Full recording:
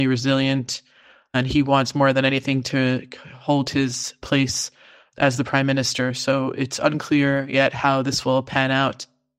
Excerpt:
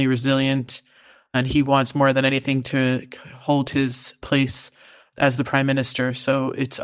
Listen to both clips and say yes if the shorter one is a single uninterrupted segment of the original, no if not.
yes